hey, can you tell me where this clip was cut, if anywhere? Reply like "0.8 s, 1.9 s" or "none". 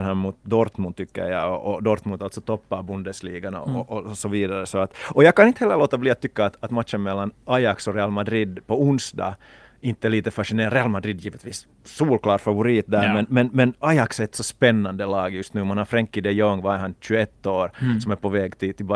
none